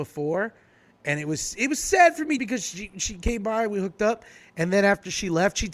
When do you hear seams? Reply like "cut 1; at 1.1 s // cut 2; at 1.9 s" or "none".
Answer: cut 1; at 2.4 s